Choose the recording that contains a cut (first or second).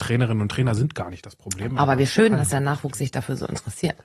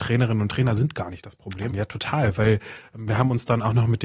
second